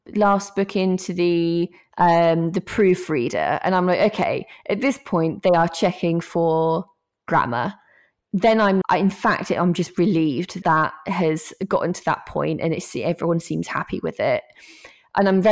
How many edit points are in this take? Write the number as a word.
two